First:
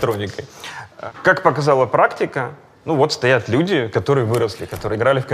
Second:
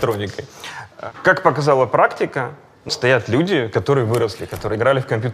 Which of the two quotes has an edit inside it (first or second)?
second